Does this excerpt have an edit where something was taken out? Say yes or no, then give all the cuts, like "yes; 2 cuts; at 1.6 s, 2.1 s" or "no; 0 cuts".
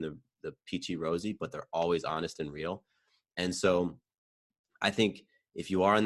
no; 0 cuts